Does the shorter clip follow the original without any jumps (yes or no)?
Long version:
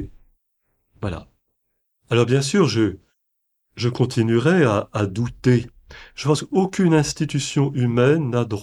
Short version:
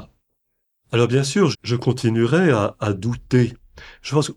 no